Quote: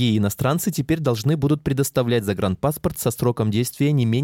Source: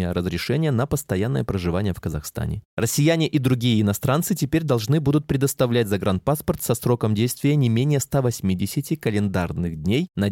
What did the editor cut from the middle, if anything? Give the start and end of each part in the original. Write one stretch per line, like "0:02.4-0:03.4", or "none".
none